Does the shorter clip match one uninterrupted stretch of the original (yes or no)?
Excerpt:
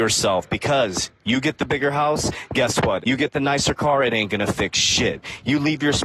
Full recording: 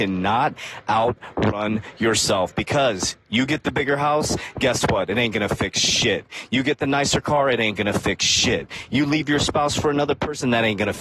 no